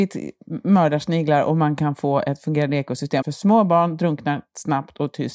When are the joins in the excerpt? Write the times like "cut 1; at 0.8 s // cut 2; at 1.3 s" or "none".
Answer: cut 1; at 3.2 s